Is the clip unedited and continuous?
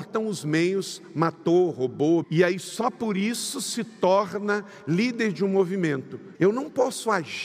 no; 2 cuts; at 2.2 s, 6.3 s

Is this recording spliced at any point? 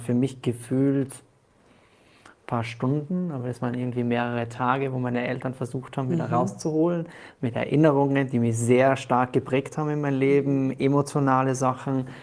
no; 0 cuts

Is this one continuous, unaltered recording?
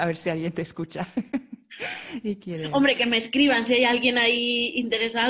yes; 0 cuts

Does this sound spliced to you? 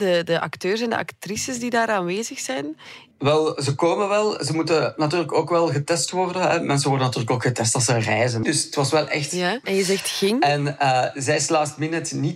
yes; 3 cuts; at 3.1 s, 8.4 s, 9.6 s

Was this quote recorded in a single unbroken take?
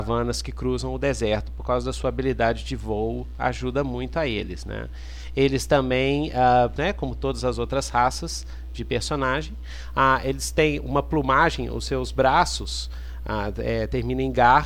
no; 1 cut; at 6.8 s

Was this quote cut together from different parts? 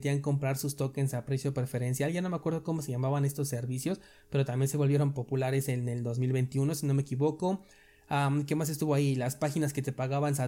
no; 0 cuts

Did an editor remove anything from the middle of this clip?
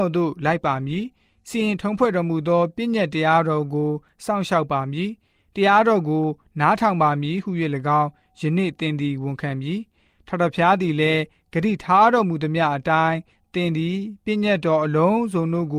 no; 0 cuts

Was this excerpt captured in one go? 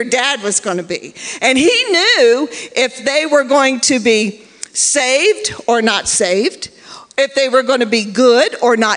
yes; 0 cuts

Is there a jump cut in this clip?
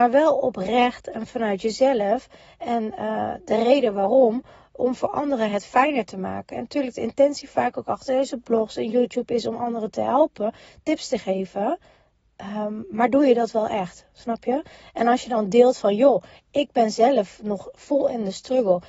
no; 0 cuts

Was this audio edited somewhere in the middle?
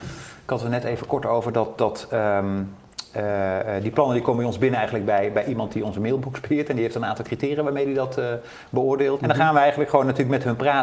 yes; 1 cut; at 9.2 s

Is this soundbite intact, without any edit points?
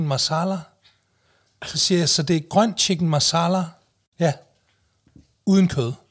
yes; 0 cuts

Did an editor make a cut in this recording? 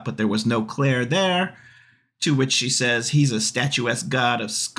yes; 1 cut; at 2.1 s

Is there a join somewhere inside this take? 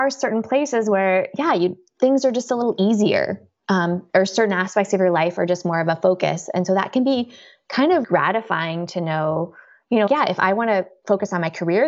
yes; 2 cuts; at 8.0 s, 10.1 s

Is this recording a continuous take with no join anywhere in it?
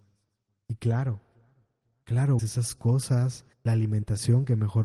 no; 2 cuts; at 2.4 s, 3.5 s

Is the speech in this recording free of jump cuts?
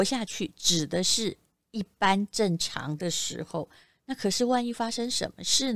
yes; 0 cuts

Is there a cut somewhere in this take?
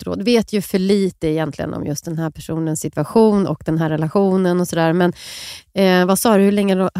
no; 0 cuts

